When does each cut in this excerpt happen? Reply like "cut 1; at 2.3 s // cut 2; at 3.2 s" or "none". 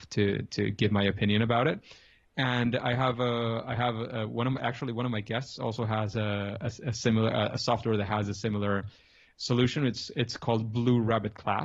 none